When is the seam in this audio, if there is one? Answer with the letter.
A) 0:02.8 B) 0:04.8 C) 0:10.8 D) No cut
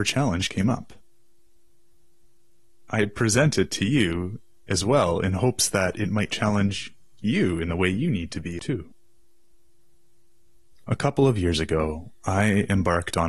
C